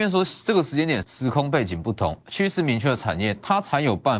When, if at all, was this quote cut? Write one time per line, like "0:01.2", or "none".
0:01.0
0:02.2